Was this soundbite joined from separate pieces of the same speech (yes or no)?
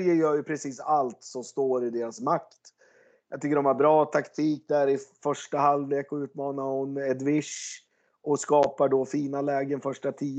no